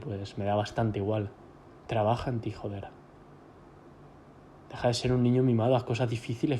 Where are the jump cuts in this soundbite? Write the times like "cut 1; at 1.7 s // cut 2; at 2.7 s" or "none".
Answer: none